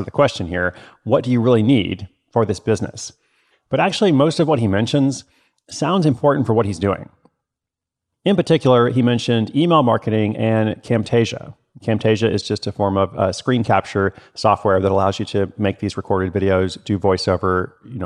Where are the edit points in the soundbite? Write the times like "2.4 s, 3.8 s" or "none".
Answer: 3.5 s